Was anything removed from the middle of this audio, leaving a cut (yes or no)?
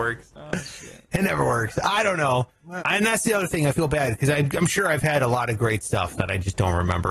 yes